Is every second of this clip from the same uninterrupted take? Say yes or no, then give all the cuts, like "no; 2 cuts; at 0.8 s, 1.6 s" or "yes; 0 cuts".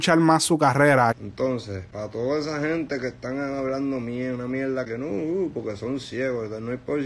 no; 1 cut; at 1.1 s